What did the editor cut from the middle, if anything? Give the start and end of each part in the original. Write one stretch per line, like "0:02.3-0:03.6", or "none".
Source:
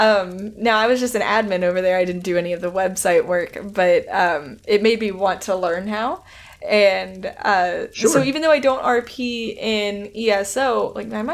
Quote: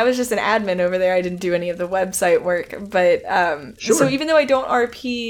0:04.6-0:07.9